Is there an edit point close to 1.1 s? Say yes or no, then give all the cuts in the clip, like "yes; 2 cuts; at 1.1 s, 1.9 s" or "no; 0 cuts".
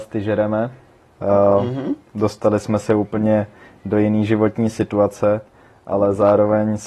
yes; 1 cut; at 1.1 s